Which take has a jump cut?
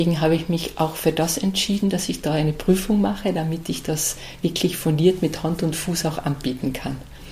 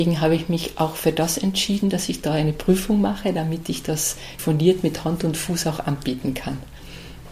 second; 1 cut; at 4.4 s

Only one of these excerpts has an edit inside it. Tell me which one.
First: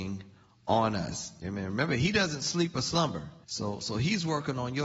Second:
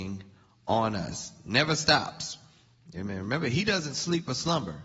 first; 2 cuts; at 1.4 s, 3.4 s

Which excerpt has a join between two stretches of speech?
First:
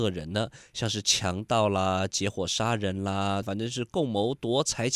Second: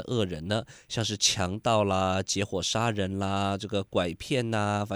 first; 1 cut; at 3.4 s

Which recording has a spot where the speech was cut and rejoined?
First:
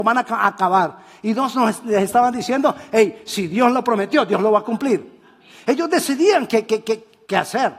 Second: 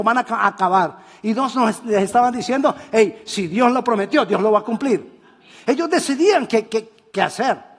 second; 1 cut; at 6.7 s

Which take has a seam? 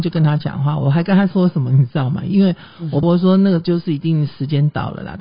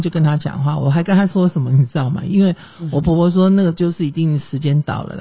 first; 1 cut; at 3.0 s

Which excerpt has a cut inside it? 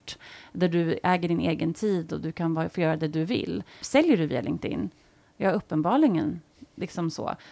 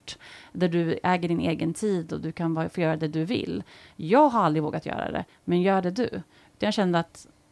first; 1 cut; at 3.8 s

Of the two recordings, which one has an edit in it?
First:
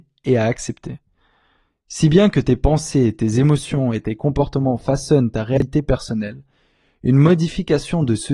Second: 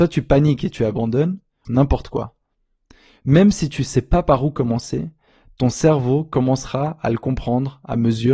second; 1 cut; at 1.7 s

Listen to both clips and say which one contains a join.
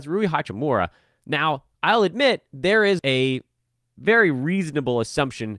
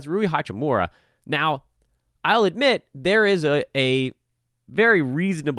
first; 2 cuts; at 1.7 s, 3.0 s

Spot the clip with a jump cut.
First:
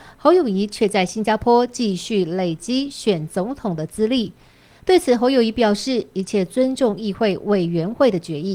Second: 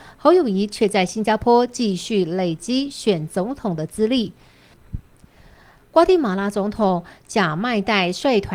second; 1 cut; at 4.7 s

